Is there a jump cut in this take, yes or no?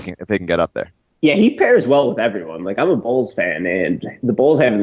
no